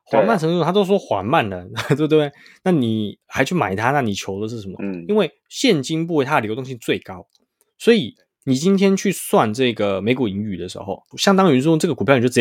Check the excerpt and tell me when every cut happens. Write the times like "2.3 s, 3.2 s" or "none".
4.8 s, 11.1 s